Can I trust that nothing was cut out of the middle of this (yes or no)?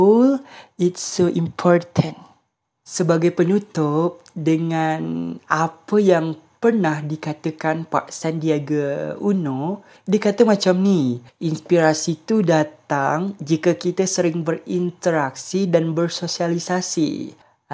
yes